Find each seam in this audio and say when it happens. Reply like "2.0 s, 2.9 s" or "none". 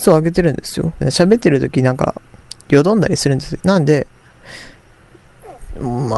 1.0 s, 3.6 s